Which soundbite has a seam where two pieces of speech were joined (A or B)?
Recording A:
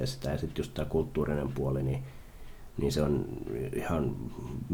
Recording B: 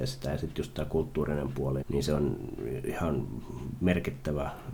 B